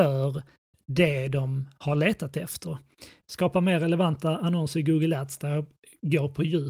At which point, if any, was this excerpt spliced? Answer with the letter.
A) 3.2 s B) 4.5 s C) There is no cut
A